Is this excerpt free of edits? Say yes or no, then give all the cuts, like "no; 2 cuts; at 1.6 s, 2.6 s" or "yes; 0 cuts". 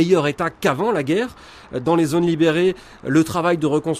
yes; 0 cuts